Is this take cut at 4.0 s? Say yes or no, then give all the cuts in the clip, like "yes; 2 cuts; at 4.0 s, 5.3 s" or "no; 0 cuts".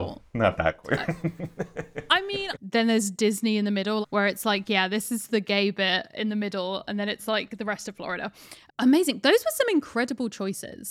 yes; 2 cuts; at 2.5 s, 4.0 s